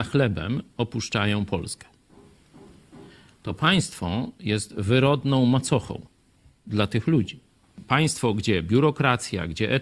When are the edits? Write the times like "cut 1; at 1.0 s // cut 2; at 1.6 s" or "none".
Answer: none